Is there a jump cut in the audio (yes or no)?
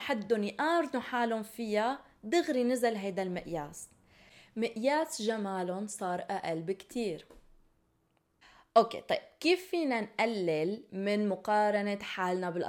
no